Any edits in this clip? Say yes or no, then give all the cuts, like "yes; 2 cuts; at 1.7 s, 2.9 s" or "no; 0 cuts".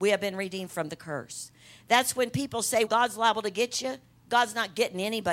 yes; 1 cut; at 2.9 s